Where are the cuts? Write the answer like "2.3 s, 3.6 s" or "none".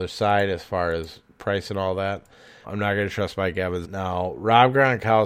2.6 s, 3.8 s